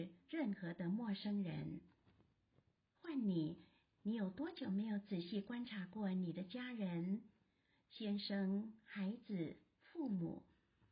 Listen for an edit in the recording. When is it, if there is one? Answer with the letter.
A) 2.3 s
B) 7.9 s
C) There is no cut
C